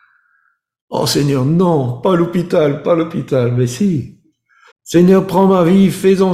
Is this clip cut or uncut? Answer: cut